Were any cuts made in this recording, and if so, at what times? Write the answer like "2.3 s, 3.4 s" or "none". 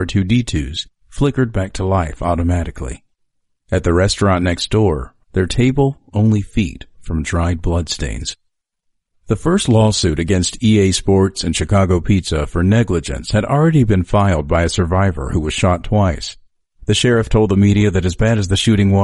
5.2 s